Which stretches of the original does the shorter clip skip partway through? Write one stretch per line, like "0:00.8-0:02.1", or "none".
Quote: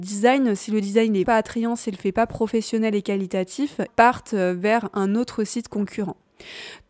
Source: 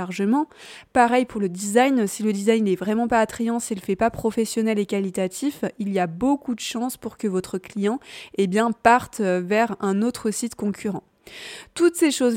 0:02.8-0:03.1
0:05.7-0:08.7